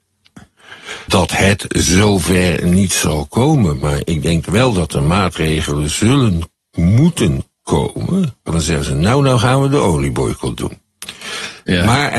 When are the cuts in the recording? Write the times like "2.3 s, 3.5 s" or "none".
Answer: 1.1 s, 8.5 s